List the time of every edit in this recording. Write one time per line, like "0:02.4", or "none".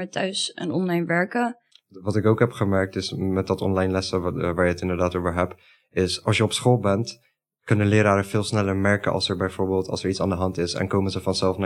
0:01.7